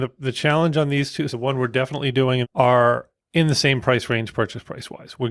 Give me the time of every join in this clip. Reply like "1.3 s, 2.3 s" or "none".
1.3 s, 2.4 s